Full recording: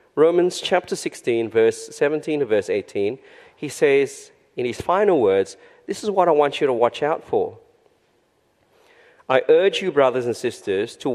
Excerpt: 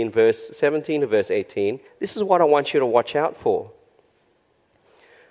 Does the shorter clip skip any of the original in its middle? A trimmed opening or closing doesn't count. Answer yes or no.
yes